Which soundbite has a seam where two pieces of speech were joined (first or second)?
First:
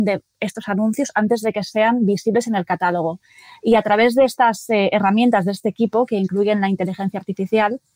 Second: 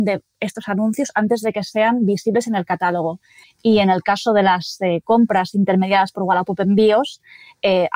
second